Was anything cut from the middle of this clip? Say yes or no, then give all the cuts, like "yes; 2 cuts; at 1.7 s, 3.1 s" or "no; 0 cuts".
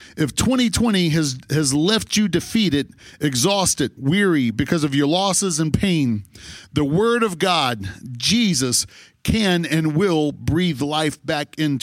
yes; 1 cut; at 4.0 s